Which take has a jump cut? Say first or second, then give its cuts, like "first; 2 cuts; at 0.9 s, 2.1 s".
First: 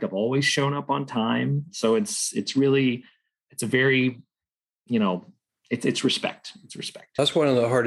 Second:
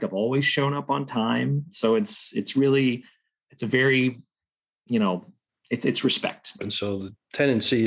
second; 1 cut; at 6.6 s